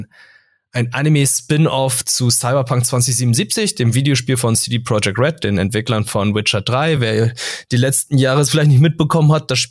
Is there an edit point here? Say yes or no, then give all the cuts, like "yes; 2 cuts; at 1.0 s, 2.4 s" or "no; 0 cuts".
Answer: no; 0 cuts